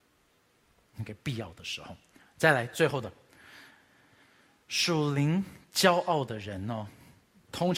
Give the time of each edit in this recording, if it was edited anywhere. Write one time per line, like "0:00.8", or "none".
none